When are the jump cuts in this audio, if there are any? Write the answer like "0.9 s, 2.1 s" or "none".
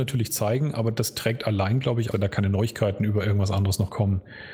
2.1 s

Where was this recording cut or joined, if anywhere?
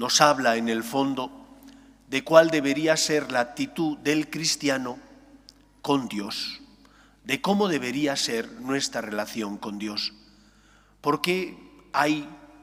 none

